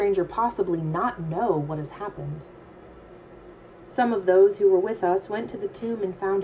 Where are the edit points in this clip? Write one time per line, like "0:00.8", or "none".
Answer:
0:03.9